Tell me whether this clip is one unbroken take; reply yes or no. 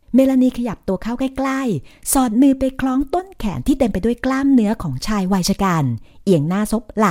yes